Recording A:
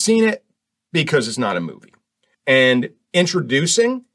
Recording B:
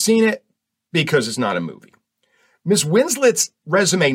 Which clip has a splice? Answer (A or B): A